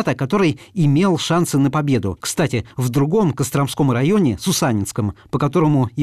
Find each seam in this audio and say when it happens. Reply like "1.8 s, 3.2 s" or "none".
2.2 s